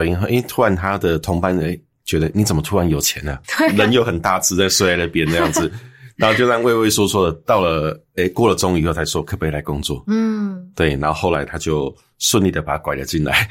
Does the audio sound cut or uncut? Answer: cut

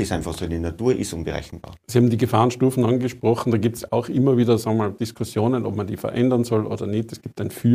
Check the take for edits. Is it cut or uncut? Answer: uncut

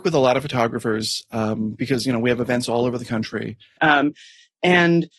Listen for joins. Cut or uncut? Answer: cut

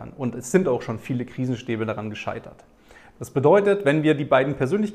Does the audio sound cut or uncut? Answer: uncut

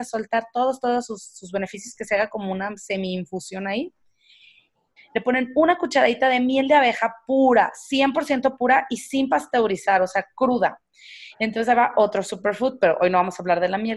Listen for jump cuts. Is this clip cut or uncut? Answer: cut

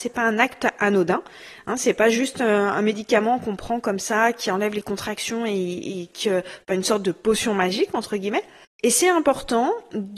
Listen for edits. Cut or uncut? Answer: cut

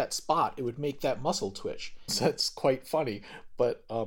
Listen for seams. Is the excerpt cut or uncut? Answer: cut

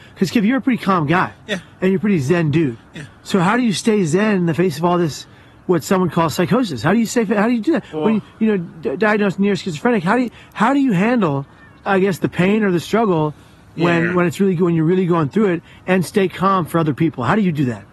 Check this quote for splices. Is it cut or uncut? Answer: uncut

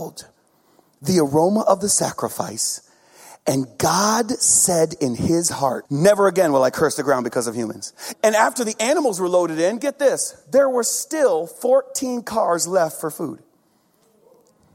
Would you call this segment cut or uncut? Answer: cut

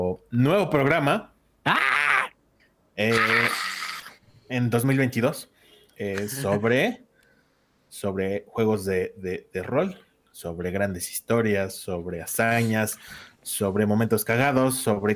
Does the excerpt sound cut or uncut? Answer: uncut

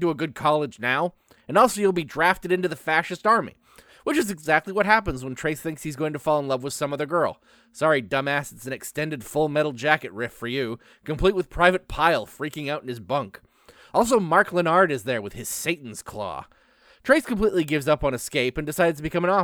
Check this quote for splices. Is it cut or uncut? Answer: uncut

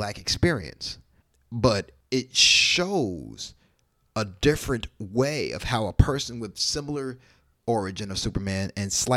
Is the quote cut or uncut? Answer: cut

